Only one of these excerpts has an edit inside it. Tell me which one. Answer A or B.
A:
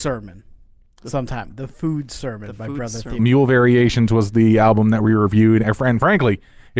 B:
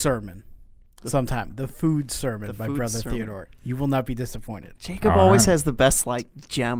A